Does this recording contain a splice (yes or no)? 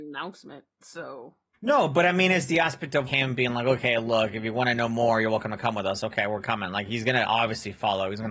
yes